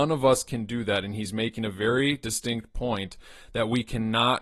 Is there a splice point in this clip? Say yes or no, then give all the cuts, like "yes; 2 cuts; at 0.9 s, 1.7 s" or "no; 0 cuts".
no; 0 cuts